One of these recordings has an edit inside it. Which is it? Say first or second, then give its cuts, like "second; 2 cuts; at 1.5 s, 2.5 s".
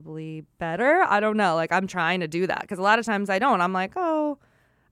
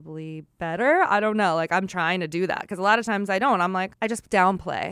second; 1 cut; at 3.9 s